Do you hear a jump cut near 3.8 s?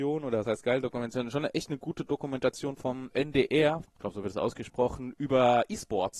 yes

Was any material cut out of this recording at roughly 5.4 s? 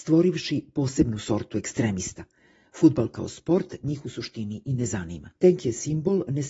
yes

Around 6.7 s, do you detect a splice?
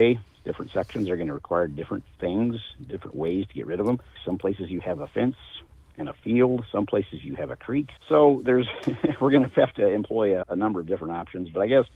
no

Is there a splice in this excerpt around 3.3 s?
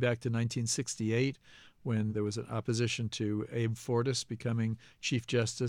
no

